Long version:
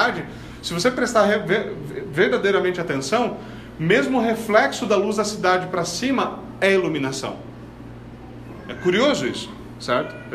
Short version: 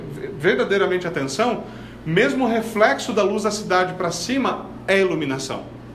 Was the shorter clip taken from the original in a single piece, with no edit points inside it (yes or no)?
yes